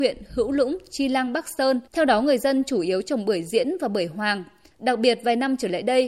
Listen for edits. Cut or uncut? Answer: cut